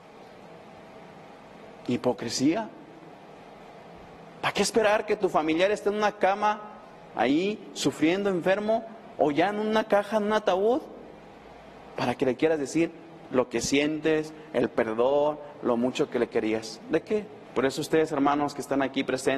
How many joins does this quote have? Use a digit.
1